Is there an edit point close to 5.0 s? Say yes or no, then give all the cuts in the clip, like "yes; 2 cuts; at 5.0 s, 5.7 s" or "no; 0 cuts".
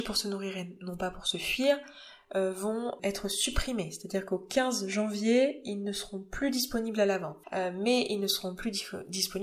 no; 2 cuts; at 3.0 s, 7.4 s